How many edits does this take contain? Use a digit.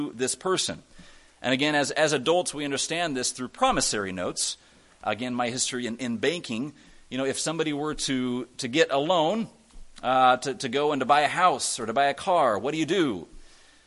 0